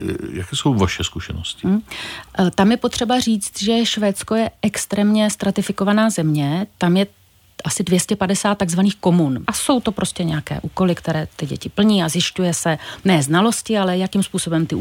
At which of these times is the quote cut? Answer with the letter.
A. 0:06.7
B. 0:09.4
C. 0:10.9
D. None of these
B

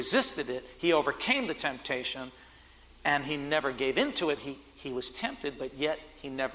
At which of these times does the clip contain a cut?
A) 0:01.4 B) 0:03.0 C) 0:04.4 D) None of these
C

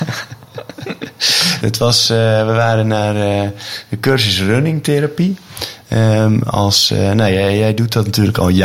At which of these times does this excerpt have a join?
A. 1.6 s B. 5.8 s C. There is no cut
A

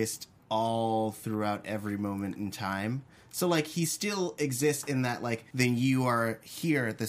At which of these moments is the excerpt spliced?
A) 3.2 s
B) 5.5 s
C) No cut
B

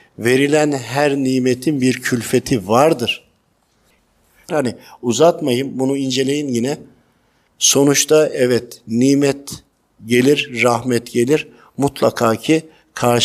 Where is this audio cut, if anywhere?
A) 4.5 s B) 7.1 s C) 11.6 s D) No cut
A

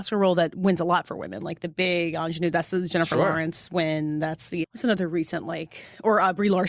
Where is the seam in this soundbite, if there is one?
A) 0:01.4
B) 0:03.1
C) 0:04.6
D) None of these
C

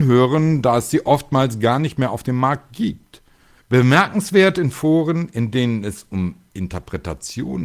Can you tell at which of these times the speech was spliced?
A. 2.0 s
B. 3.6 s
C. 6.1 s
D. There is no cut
B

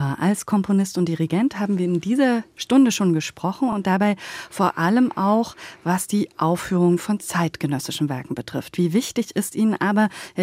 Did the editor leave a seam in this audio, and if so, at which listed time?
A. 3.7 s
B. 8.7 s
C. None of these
C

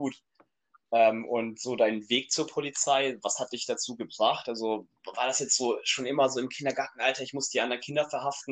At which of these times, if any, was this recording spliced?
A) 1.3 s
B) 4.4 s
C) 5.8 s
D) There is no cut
D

